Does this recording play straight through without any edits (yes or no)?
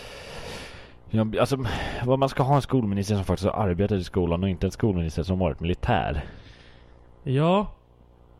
yes